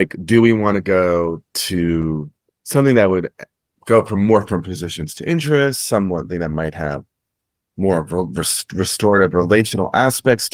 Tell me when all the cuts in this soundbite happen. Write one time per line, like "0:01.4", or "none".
none